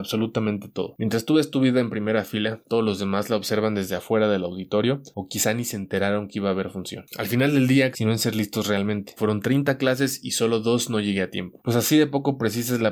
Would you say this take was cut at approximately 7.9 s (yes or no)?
yes